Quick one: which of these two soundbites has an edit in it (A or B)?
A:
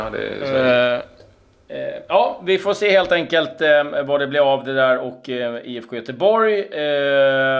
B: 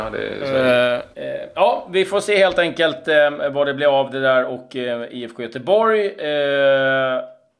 B